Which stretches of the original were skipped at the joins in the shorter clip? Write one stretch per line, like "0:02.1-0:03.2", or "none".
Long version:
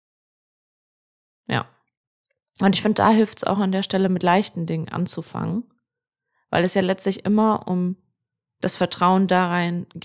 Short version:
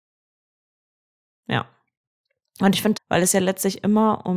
0:02.9-0:06.4